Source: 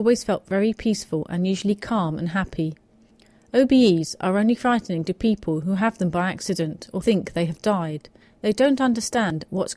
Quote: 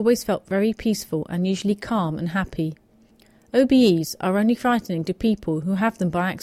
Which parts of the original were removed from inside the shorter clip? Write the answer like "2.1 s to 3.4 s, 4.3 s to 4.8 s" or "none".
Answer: none